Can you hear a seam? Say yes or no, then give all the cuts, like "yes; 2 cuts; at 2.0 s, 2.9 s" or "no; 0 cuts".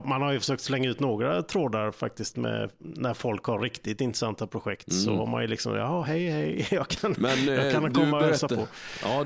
no; 0 cuts